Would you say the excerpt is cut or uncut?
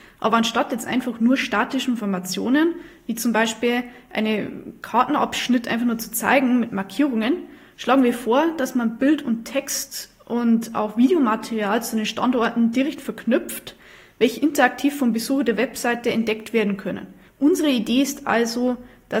cut